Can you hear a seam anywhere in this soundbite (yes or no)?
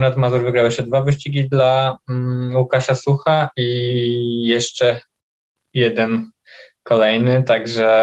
no